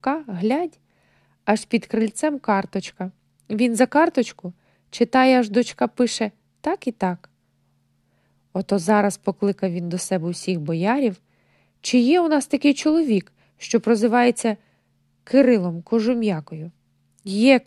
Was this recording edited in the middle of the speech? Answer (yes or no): no